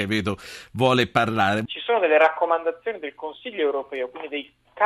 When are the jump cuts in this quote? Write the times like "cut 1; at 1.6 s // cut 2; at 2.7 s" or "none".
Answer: cut 1; at 1.7 s